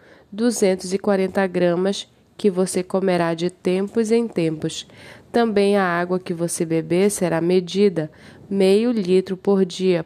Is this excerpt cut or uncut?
uncut